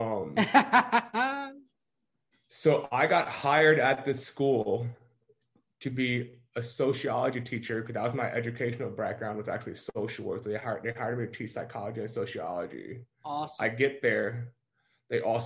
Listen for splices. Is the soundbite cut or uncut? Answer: uncut